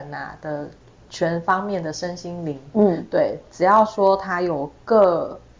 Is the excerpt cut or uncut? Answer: uncut